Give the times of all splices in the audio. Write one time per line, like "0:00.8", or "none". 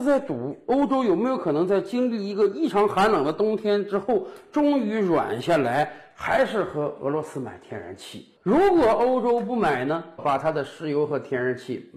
0:08.4
0:10.2